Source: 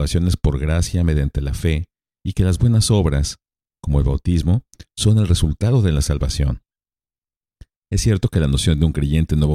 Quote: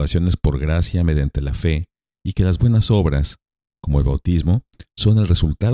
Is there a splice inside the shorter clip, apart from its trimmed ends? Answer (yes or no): no